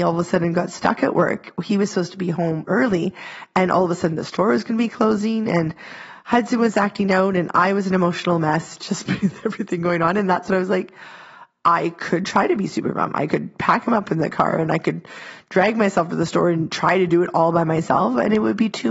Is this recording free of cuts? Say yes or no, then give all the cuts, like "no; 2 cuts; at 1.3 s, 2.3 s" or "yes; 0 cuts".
yes; 0 cuts